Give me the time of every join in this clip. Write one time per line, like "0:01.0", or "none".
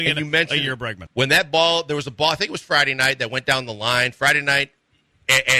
0:01.1